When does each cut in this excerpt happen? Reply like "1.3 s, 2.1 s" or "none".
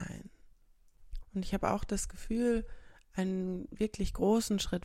1.2 s